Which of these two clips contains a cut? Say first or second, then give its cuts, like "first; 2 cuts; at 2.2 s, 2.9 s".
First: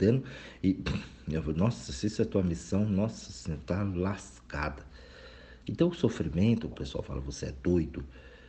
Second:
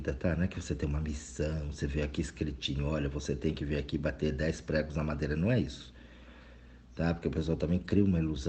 first; 2 cuts; at 5.6 s, 6.7 s